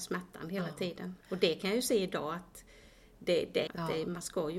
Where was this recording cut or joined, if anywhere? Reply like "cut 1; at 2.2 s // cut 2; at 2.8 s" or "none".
cut 1; at 1.2 s // cut 2; at 3.7 s